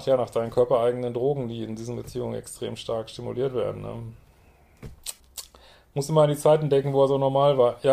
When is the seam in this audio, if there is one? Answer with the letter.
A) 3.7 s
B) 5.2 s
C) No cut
B